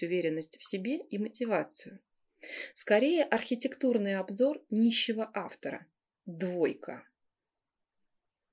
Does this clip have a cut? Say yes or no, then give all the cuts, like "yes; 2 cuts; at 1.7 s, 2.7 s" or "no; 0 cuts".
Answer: yes; 1 cut; at 2.7 s